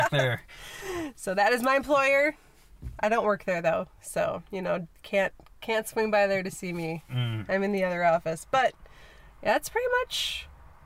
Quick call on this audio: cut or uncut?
uncut